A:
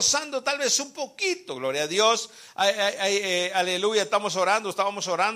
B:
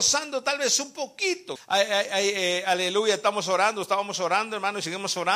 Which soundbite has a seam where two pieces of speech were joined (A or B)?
B